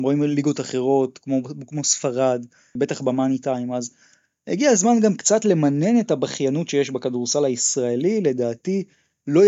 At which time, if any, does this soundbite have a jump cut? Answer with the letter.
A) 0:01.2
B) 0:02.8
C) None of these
B